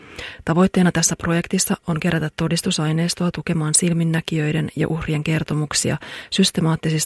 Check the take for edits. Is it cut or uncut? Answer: uncut